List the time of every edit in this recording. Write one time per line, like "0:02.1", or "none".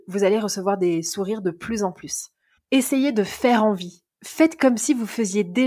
0:02.6